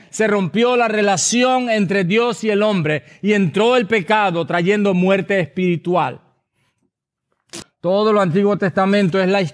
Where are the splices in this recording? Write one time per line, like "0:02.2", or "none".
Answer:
0:07.6